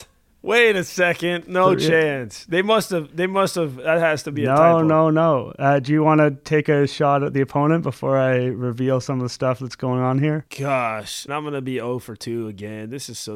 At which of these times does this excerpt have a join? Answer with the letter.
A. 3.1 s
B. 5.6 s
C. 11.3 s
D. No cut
C